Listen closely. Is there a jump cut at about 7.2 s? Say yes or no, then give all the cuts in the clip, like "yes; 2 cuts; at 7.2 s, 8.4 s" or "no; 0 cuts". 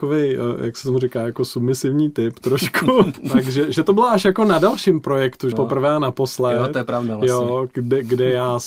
no; 2 cuts; at 3.1 s, 5.5 s